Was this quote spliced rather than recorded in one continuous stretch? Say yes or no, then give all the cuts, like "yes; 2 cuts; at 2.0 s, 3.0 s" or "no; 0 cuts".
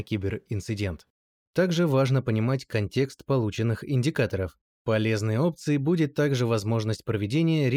yes; 2 cuts; at 1.4 s, 4.6 s